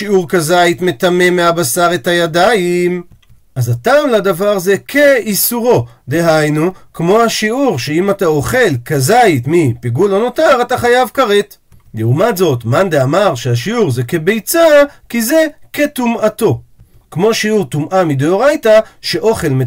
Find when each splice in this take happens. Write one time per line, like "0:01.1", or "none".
none